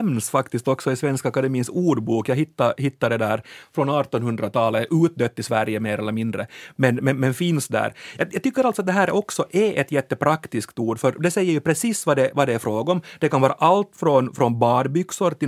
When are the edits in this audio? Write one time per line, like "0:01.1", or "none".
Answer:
none